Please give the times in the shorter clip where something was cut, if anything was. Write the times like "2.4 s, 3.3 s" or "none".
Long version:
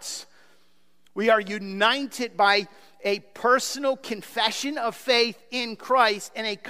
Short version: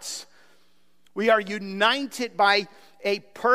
none